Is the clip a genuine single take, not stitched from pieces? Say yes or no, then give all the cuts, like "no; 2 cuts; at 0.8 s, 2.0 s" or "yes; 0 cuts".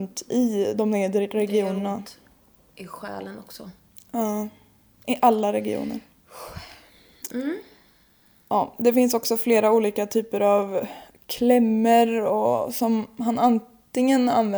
yes; 0 cuts